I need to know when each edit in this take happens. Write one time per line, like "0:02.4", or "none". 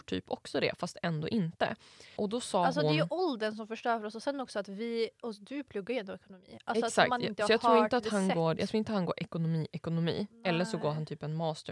none

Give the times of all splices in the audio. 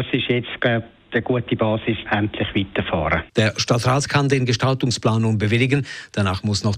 0:02.1
0:03.3

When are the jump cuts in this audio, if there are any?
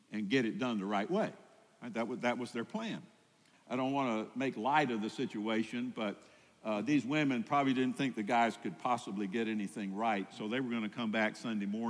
0:03.5

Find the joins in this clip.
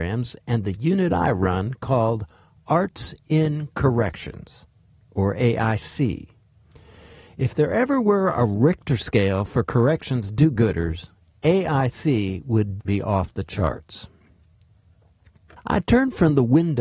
0:12.8

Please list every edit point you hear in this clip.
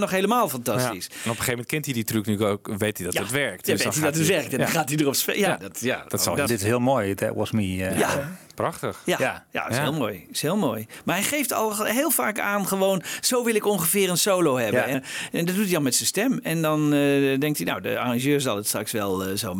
0:06.5
0:14.9

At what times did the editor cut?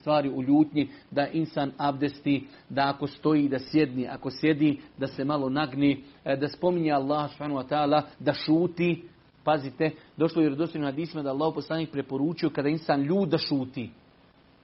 none

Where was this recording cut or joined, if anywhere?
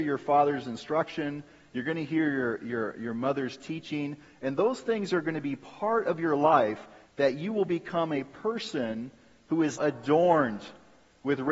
0:07.1
0:09.8

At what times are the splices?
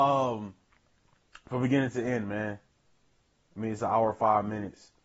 none

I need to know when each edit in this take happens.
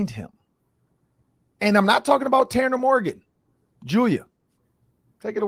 none

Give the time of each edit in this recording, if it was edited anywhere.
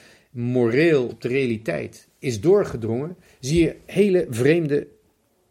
0:01.1

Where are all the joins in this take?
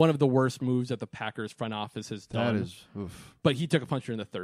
none

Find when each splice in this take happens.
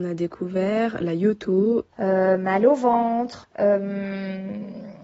0:01.9
0:03.4

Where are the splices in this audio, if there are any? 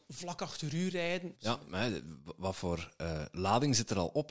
0:01.3

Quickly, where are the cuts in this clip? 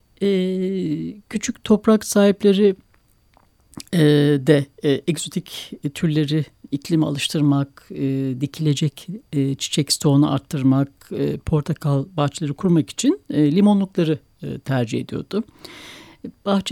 none

